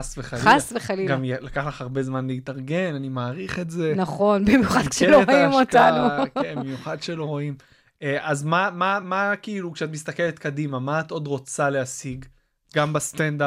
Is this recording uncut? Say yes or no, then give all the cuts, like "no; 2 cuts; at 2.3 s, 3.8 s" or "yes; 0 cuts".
yes; 0 cuts